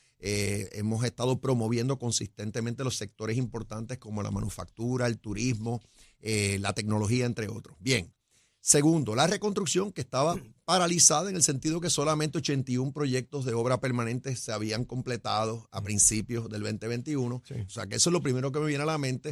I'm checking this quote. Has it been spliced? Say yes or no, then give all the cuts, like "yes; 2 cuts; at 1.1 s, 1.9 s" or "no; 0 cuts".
yes; 1 cut; at 17.7 s